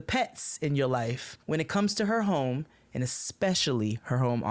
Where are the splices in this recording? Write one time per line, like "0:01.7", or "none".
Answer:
0:01.4